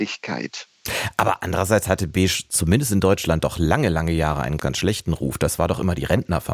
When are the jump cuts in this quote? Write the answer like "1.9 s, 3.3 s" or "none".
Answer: 4.6 s